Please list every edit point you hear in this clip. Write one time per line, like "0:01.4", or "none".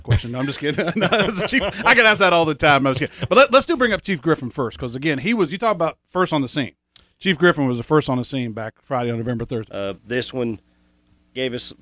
0:09.7